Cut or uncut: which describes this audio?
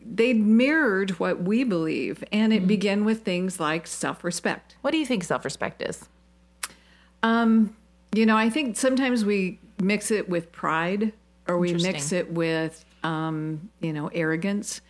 cut